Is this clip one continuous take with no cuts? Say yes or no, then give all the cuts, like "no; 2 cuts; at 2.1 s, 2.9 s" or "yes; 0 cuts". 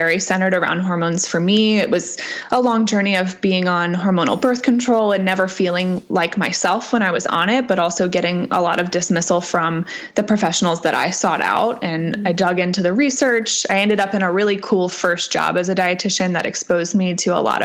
yes; 0 cuts